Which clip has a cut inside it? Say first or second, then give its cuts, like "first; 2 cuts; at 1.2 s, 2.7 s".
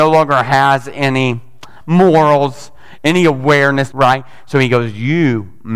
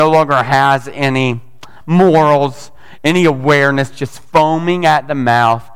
first; 1 cut; at 3.9 s